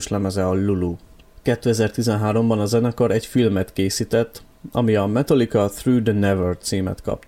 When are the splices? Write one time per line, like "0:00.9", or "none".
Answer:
none